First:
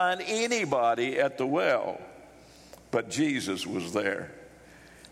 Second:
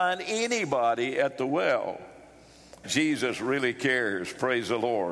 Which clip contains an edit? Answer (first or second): second